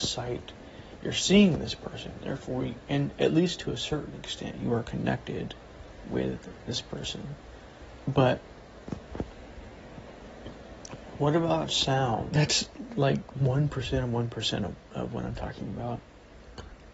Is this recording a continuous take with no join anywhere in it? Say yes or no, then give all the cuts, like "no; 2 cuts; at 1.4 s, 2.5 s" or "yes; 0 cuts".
no; 2 cuts; at 8.0 s, 12.3 s